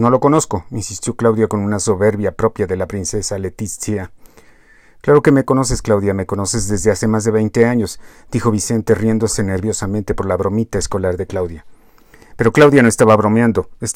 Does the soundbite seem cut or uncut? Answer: uncut